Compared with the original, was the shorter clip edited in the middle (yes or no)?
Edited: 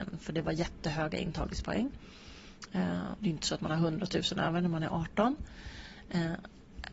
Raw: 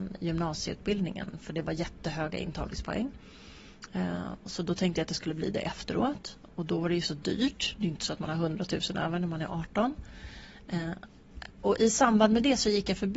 yes